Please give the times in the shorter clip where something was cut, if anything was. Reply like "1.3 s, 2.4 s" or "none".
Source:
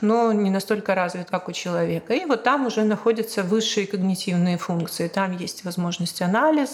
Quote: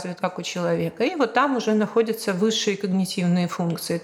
none